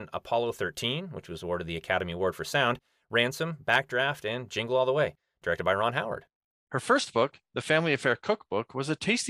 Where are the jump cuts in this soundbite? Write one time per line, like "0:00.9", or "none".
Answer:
0:06.5